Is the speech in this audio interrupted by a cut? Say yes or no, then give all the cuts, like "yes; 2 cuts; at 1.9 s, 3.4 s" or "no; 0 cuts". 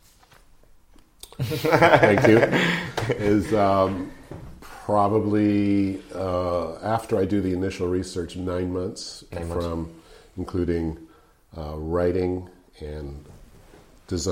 no; 0 cuts